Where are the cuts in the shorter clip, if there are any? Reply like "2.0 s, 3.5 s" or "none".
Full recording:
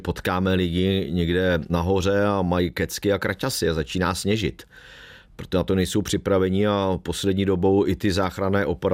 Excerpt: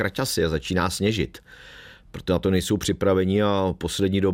none